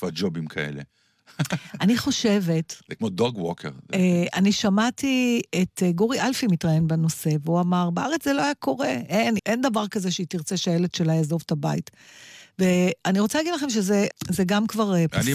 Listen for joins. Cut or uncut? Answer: cut